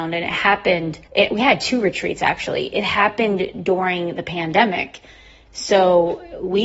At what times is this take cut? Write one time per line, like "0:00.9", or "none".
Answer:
0:01.0